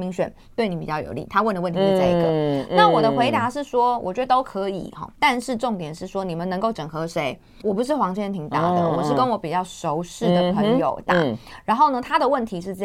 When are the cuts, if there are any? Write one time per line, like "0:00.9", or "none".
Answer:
0:07.6